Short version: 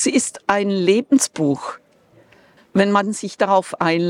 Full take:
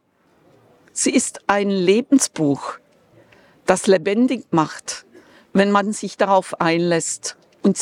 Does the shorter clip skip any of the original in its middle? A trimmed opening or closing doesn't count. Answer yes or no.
yes